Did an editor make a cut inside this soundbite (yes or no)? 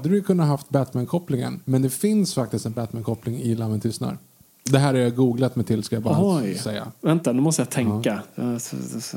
no